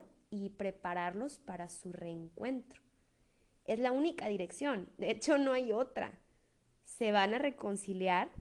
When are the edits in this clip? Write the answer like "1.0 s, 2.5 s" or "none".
none

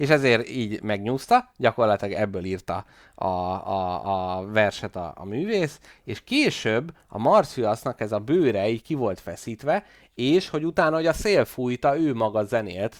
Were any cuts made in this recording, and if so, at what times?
none

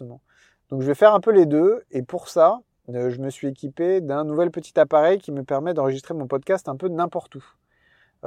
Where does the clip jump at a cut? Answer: none

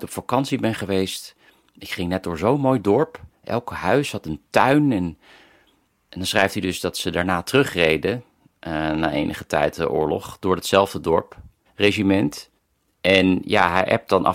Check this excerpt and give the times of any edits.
11.7 s

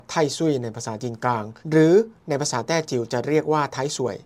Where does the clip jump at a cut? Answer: 1.6 s

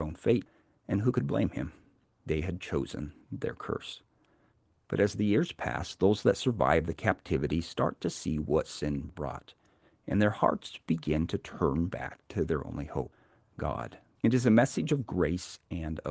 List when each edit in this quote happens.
9.1 s, 14.2 s

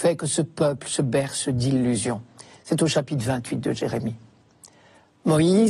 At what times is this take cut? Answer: none

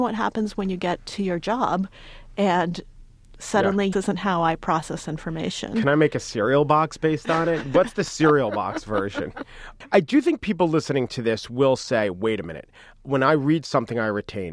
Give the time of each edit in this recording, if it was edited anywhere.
3.9 s

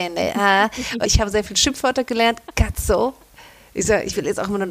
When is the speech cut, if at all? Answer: 1.0 s

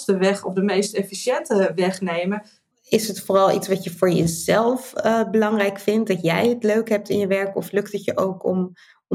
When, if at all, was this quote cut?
2.7 s

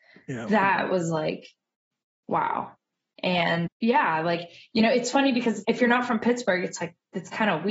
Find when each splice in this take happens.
3.7 s, 5.6 s

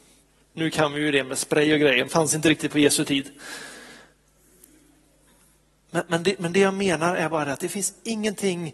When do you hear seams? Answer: 2.1 s

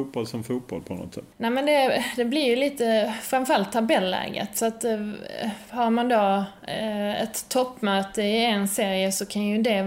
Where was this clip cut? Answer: 1.3 s

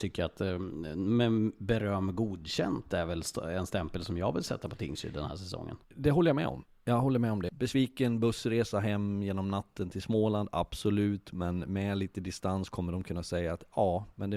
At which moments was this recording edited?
5.8 s, 7.5 s

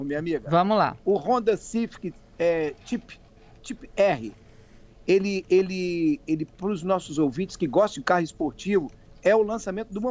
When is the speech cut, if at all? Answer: none

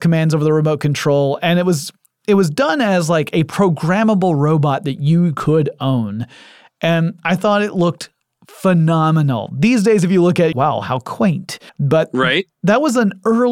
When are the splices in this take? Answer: 10.5 s, 11.7 s

